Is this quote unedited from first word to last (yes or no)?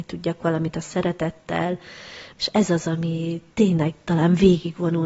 no